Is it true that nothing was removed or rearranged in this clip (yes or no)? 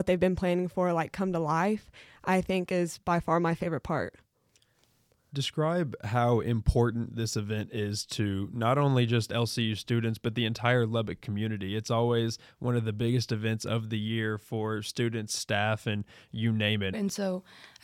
no